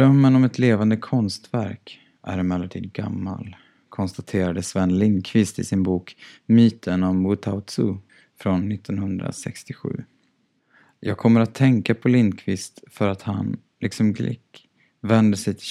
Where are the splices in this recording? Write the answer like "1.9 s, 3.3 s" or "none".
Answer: none